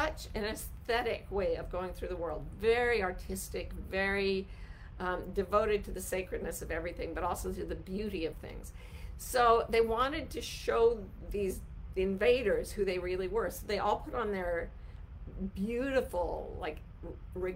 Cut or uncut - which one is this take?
uncut